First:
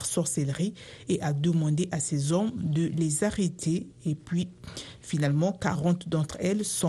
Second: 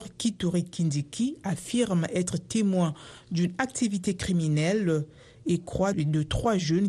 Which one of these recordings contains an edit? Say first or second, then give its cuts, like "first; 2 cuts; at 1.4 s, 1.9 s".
second; 1 cut; at 5.9 s